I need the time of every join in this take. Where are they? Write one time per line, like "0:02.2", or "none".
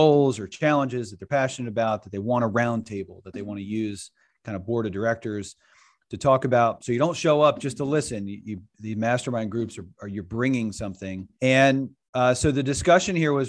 0:11.3